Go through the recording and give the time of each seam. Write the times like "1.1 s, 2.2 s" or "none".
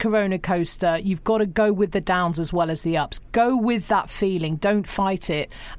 none